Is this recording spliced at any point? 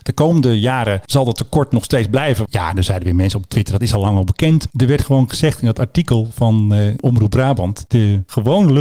yes; 2 cuts; at 2.5 s, 4.7 s

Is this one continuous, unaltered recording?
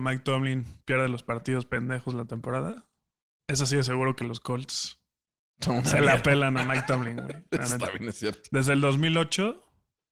yes; 0 cuts

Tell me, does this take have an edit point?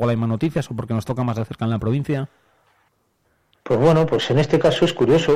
no; 0 cuts

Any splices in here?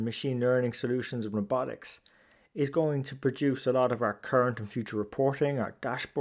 no; 0 cuts

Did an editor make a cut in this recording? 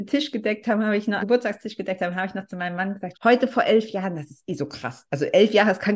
yes; 2 cuts; at 1.2 s, 3.1 s

